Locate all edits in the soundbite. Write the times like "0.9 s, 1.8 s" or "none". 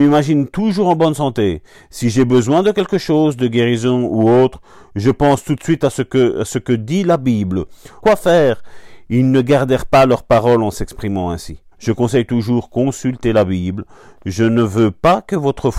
8.0 s, 11.7 s